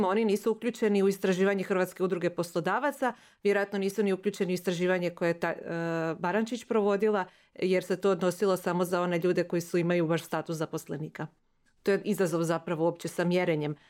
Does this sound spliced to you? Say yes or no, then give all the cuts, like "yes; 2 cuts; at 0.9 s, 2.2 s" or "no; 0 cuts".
no; 0 cuts